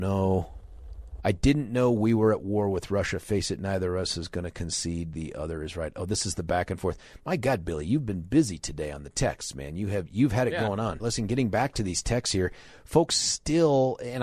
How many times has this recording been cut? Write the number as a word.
one